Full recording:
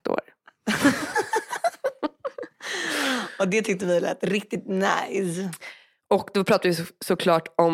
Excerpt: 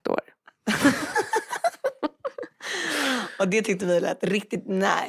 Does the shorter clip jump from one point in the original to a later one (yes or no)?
no